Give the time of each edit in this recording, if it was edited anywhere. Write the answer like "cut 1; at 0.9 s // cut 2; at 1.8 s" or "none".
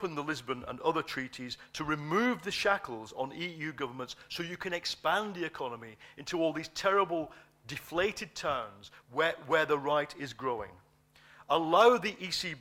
cut 1; at 9.0 s